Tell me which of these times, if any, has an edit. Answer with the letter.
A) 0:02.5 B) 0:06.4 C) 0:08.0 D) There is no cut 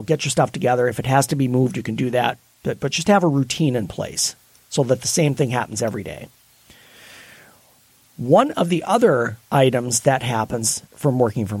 D